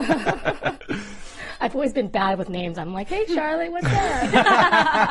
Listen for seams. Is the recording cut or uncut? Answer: uncut